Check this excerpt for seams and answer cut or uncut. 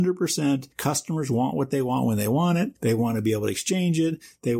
uncut